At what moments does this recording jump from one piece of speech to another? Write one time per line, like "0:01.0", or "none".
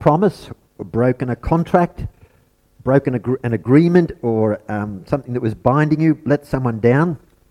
none